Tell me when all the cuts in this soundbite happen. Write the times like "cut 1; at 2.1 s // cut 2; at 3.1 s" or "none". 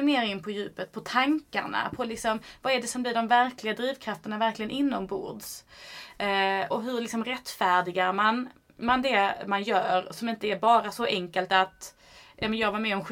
cut 1; at 6.7 s